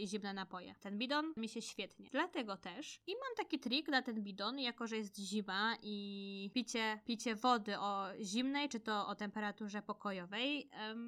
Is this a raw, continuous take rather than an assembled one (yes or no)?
no